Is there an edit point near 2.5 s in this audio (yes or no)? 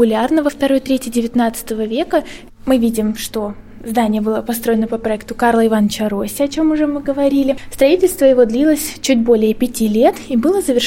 yes